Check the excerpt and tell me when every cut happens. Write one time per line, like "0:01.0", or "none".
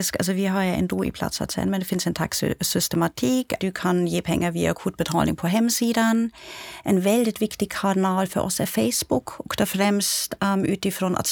0:03.6